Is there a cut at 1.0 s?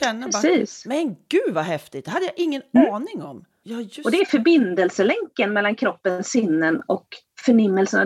no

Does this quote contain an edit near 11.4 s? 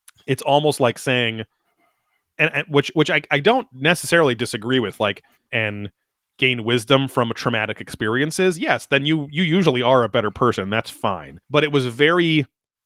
yes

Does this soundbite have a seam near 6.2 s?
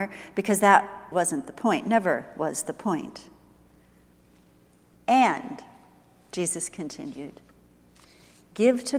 no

